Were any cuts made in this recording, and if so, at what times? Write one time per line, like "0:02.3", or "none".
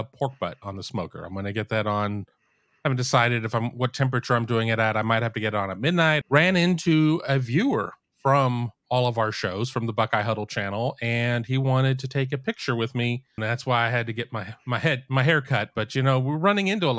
0:06.2
0:13.4